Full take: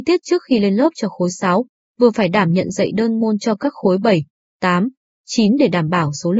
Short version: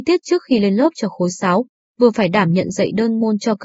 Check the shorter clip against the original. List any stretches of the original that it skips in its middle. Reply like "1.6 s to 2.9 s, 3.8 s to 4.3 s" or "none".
none